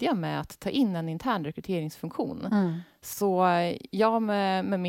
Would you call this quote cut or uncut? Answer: uncut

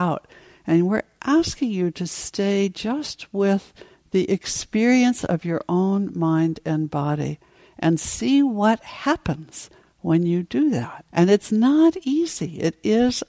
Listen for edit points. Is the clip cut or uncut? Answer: cut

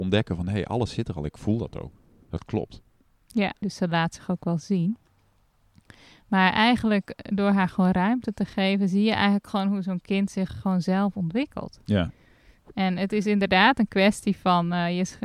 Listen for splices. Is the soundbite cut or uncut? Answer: cut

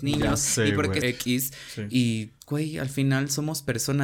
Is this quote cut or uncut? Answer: cut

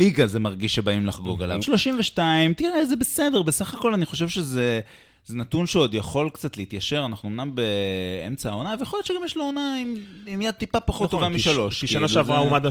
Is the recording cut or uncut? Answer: cut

